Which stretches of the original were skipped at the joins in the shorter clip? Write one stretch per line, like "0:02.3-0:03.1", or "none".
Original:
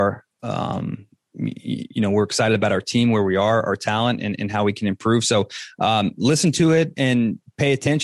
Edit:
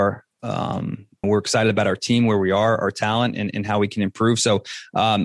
0:01.2-0:02.1